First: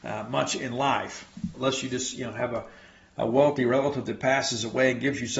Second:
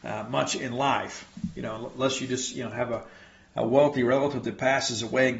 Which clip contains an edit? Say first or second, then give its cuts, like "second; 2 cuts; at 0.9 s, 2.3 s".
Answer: first; 1 cut; at 1.5 s